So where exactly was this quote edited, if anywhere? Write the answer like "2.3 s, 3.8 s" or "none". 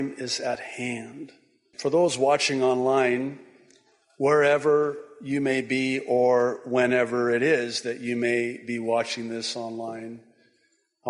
1.7 s